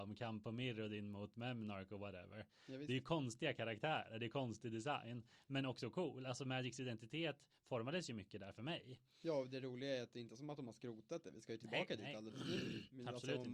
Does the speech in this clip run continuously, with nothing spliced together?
yes; 0 cuts

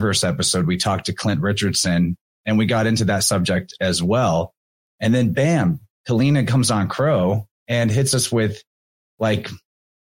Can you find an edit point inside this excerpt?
no; 0 cuts

